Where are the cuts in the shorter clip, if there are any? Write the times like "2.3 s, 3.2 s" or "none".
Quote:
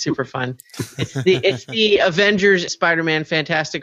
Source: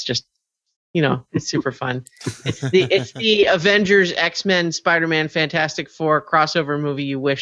2.7 s